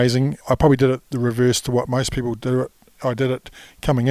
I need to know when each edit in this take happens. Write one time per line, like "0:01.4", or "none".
none